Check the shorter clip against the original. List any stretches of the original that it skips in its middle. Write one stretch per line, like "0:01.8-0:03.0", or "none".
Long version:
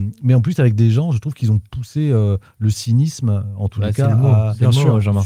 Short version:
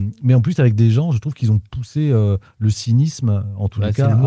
none